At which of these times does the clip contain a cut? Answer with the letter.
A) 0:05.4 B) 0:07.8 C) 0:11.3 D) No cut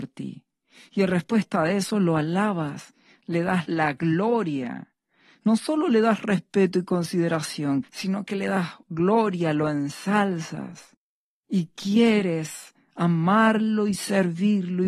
B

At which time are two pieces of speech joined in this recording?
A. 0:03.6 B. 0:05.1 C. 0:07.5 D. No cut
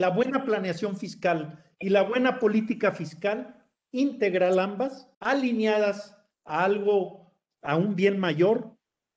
B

